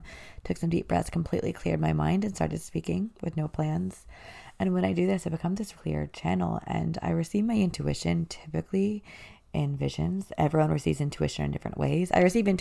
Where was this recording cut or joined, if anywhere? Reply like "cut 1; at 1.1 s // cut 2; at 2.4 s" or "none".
cut 1; at 5.7 s